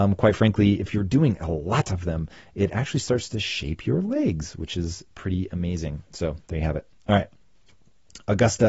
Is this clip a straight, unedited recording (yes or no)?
yes